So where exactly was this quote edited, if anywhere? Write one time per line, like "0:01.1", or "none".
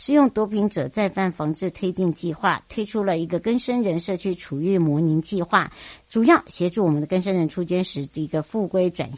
none